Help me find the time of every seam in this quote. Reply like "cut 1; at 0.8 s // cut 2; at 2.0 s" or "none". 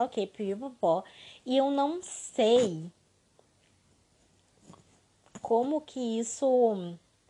none